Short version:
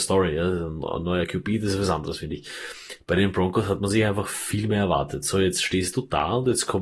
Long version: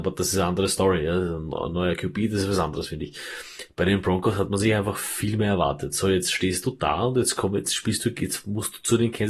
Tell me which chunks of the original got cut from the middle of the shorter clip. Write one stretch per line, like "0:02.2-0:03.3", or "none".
none